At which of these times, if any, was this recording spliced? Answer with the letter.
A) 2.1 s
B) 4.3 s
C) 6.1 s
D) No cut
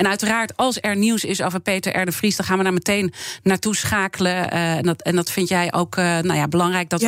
D